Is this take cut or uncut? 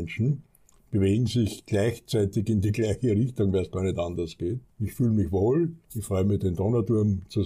cut